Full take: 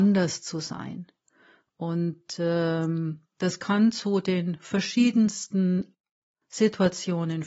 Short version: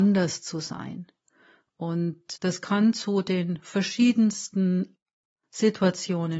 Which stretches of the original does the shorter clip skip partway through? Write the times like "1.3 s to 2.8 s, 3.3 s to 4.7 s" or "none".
2.4 s to 3.3 s